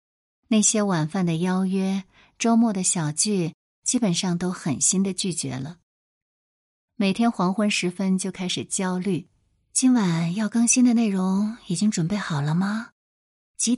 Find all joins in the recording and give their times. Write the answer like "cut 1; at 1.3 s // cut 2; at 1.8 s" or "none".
none